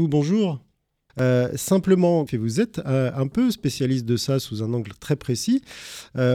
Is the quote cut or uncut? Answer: cut